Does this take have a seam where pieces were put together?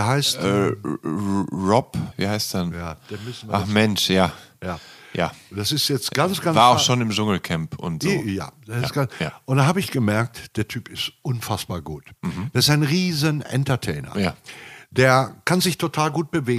yes; 1 cut; at 2.1 s

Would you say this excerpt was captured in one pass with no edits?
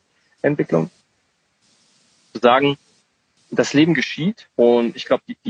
no; 1 cut; at 4.5 s

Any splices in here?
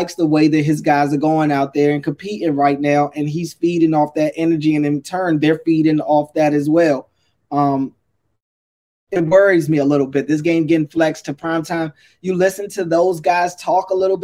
no; 0 cuts

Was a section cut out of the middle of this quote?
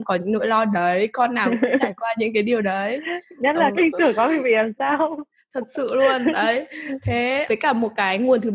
yes; 2 cuts; at 3.7 s, 7.5 s

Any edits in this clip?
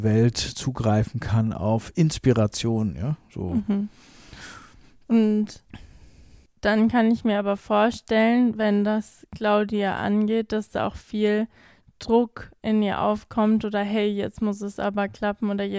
no; 0 cuts

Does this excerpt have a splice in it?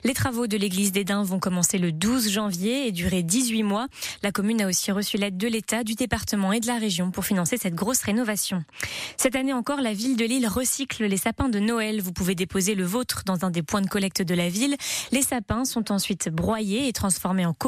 no; 0 cuts

